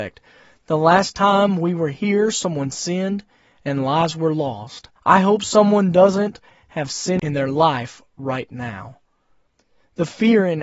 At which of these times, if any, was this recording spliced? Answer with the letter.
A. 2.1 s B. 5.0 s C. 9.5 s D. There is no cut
B